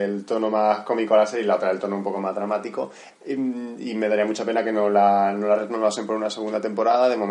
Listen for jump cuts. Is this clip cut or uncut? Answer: cut